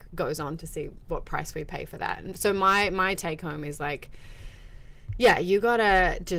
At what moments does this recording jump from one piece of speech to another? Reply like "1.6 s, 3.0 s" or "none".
none